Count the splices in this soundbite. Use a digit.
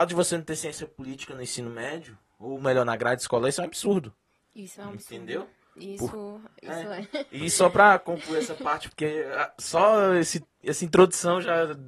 1